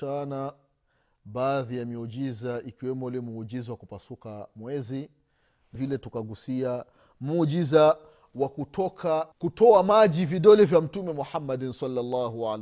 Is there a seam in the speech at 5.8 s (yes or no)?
yes